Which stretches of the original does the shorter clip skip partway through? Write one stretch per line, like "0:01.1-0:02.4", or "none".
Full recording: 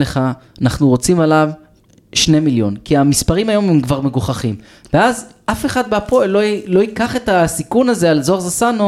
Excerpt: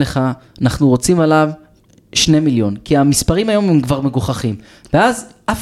none